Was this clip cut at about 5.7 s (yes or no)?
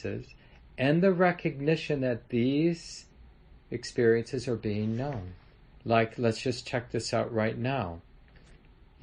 yes